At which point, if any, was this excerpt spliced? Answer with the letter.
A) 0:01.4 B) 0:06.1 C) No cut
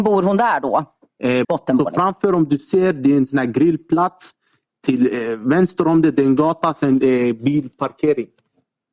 A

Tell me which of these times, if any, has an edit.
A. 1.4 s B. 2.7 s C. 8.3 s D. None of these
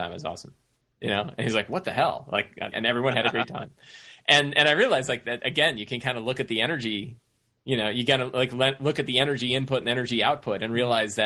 B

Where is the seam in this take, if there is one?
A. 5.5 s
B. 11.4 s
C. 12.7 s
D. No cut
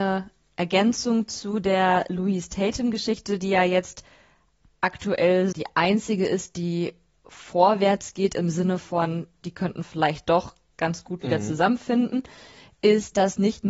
A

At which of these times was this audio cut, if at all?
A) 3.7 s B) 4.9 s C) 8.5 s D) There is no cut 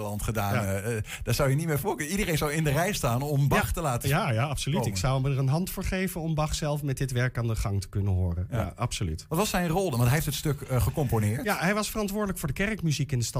D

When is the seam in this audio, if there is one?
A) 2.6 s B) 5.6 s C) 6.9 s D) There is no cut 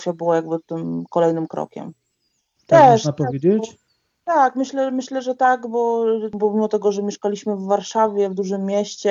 A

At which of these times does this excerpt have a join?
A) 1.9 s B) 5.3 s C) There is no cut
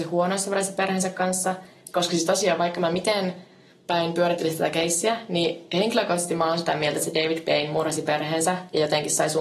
A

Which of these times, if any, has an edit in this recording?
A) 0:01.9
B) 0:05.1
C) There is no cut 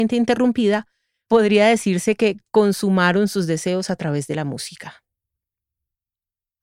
C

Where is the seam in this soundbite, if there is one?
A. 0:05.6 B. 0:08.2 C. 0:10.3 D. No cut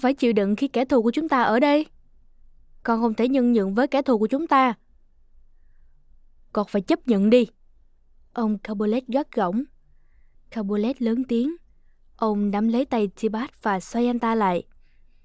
C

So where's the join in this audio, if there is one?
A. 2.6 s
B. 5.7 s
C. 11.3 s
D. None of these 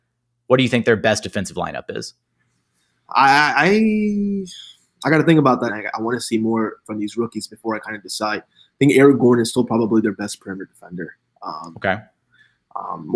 B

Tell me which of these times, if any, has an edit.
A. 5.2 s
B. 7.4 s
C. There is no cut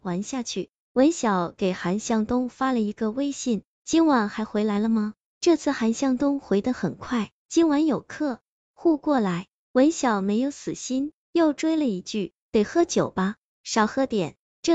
B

